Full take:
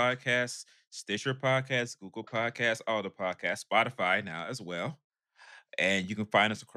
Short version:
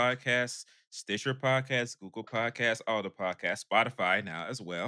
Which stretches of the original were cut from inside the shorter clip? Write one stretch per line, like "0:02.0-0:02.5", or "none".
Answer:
none